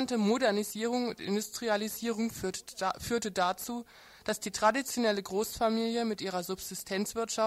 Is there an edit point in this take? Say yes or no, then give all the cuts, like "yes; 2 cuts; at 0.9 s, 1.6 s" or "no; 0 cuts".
no; 0 cuts